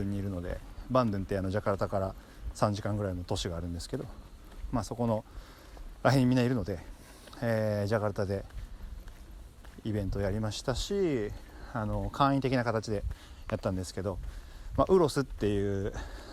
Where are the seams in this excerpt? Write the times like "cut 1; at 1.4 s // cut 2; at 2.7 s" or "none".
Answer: none

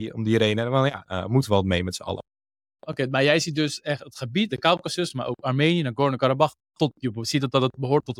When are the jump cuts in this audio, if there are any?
cut 1; at 1.1 s

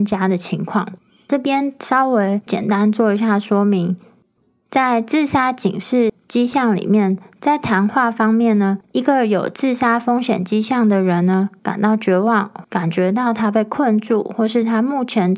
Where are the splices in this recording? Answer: cut 1; at 11.6 s // cut 2; at 12.6 s

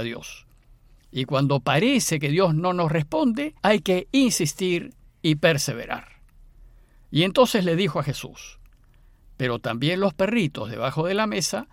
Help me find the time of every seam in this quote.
cut 1; at 3.6 s

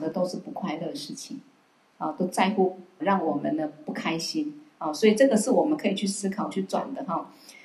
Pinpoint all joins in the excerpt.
cut 1; at 3.0 s

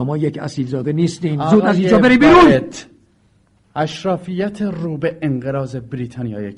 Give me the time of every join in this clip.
none

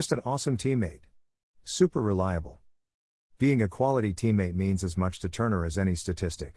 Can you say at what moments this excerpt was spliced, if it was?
none

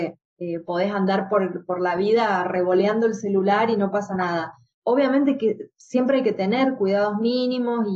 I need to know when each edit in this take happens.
none

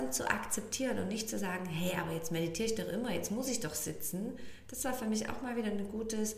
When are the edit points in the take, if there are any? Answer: none

